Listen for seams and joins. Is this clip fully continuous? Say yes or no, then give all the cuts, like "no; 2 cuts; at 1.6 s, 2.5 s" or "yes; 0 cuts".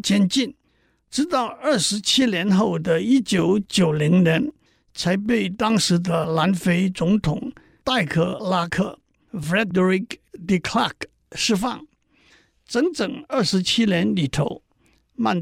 yes; 0 cuts